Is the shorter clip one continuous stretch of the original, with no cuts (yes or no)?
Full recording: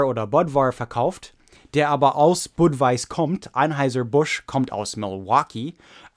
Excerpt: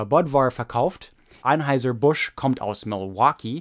no